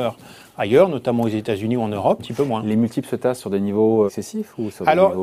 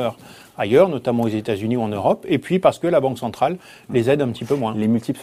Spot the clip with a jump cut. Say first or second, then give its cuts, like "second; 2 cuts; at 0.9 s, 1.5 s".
first; 2 cuts; at 2.2 s, 4.1 s